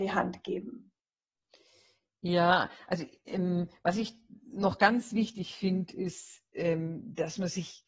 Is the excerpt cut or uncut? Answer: uncut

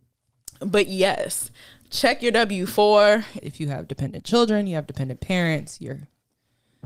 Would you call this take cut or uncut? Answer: cut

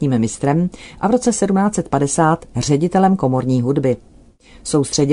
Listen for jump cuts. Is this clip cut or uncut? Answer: uncut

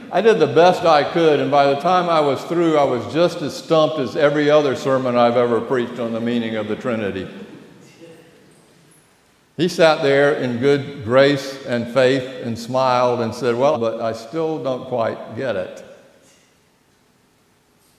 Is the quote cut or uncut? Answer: cut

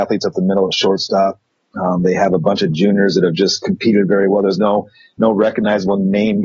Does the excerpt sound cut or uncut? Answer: uncut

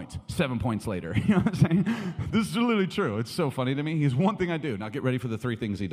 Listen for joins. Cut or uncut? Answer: uncut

